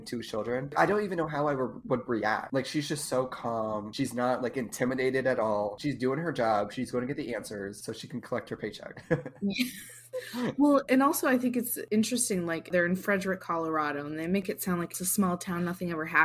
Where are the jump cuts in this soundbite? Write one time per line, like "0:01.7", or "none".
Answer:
none